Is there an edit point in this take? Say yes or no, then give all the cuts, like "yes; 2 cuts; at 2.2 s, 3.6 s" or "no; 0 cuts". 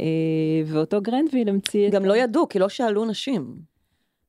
no; 0 cuts